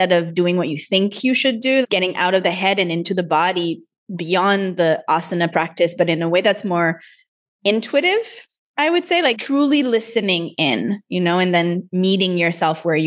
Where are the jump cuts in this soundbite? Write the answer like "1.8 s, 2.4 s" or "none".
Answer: 1.8 s